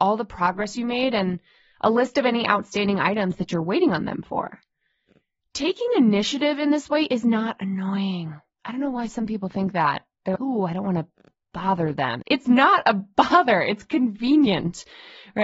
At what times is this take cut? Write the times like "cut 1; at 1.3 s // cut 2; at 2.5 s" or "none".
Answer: cut 1; at 10.3 s // cut 2; at 12.2 s